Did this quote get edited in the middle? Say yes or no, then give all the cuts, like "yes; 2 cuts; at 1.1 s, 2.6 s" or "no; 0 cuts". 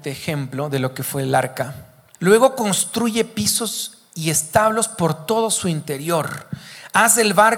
yes; 1 cut; at 2.1 s